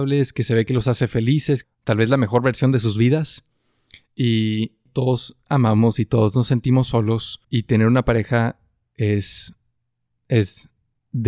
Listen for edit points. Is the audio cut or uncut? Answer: cut